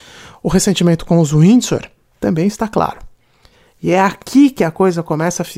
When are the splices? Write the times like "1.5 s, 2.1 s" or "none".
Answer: none